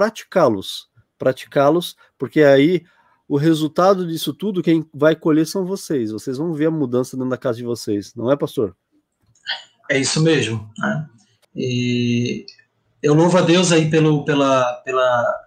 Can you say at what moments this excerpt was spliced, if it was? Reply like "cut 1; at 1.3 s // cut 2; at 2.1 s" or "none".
cut 1; at 11.4 s